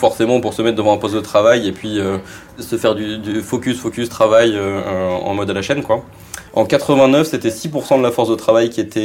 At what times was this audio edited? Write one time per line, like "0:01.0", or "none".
0:06.5